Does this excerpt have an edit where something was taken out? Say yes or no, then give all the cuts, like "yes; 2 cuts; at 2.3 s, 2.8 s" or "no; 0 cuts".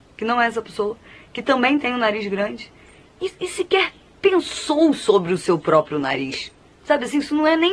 no; 0 cuts